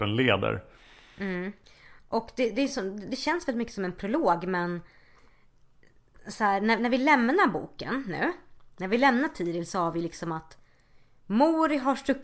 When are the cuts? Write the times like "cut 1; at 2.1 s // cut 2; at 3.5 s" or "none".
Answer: none